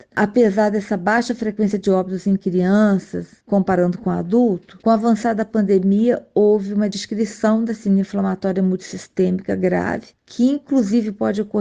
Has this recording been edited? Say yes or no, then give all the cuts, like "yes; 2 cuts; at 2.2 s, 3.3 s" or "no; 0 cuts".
no; 0 cuts